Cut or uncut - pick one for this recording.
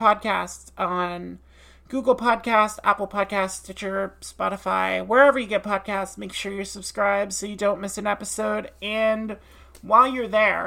uncut